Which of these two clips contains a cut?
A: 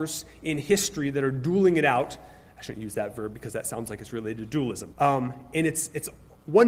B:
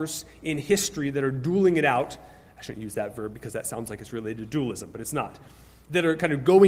A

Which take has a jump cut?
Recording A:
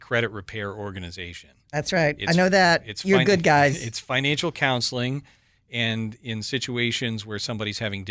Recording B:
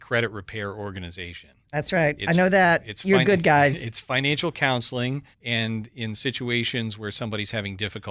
B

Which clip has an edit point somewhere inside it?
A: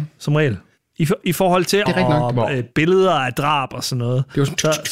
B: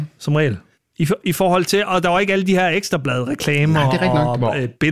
A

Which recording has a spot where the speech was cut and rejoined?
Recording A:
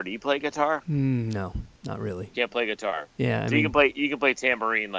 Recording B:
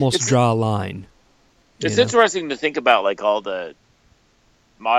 A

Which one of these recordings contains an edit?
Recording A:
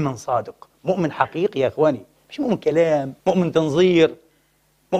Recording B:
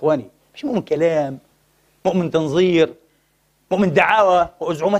A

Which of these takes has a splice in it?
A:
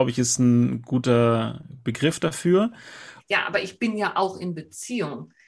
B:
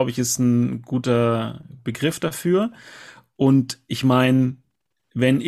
A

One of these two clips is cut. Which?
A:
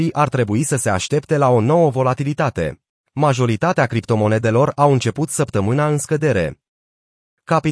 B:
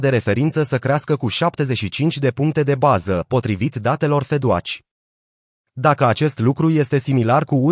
A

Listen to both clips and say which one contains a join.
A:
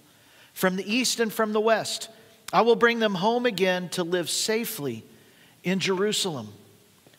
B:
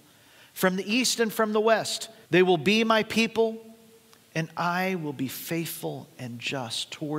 B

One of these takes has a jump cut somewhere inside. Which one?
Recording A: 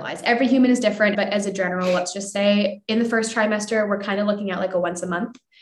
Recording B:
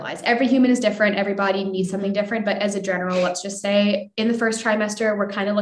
A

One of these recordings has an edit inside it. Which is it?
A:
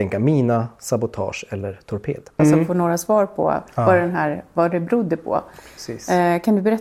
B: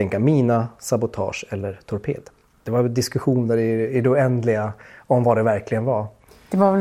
A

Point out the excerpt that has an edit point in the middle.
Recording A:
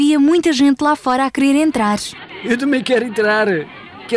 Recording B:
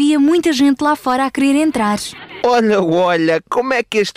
B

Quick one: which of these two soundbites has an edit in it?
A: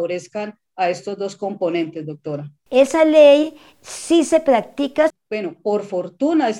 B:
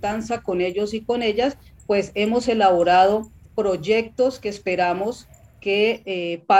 A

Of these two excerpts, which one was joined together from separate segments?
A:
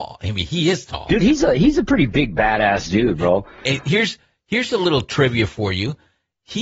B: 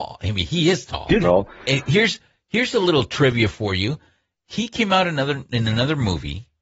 B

